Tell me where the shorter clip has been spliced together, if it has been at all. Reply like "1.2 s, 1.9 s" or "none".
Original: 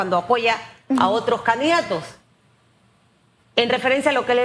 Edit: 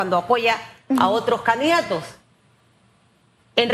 none